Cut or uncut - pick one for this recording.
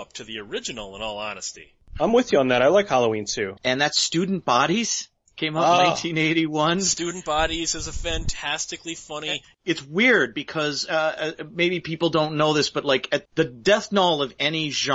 cut